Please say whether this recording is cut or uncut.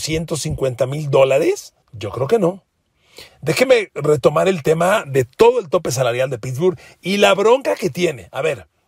cut